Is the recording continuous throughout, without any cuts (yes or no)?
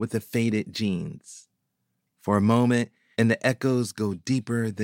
no